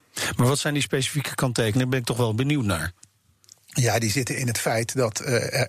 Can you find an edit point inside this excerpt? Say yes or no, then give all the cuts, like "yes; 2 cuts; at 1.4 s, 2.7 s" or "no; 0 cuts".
no; 0 cuts